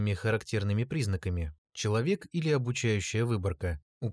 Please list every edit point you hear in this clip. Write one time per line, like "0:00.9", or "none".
0:01.6